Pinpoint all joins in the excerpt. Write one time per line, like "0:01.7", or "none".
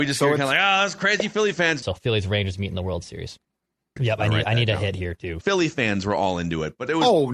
0:01.8
0:04.0
0:05.4